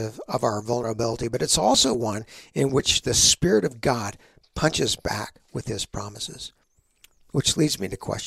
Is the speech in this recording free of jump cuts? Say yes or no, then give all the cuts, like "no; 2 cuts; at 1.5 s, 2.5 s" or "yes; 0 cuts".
yes; 0 cuts